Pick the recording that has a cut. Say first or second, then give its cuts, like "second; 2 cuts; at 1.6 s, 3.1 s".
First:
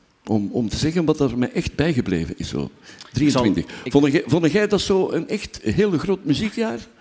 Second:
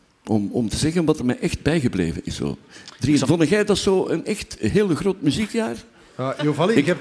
second; 2 cuts; at 1.2 s, 3.2 s